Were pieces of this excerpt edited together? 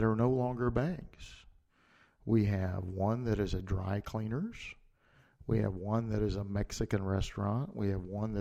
no; 0 cuts

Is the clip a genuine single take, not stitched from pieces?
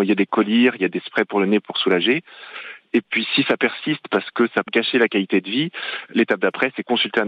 no; 1 cut; at 4.7 s

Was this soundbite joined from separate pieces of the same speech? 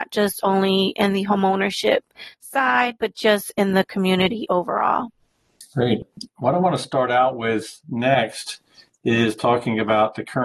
no; 0 cuts

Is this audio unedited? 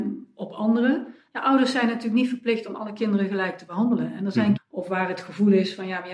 no; 1 cut; at 4.6 s

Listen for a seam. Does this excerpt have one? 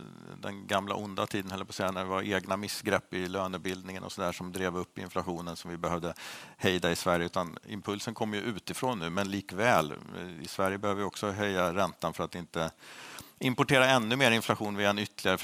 no; 0 cuts

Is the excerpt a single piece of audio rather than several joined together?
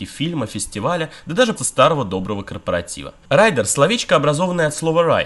no; 2 cuts; at 1.6 s, 3.2 s

